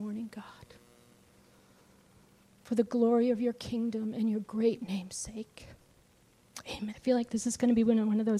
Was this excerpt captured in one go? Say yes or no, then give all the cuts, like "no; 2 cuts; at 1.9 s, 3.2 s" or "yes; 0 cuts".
no; 1 cut; at 6.9 s